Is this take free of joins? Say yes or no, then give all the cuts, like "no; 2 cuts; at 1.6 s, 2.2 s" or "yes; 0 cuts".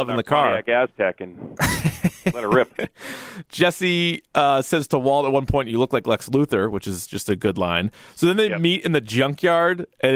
yes; 0 cuts